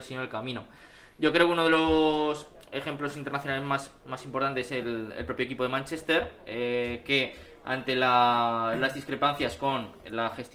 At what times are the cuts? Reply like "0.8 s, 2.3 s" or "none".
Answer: none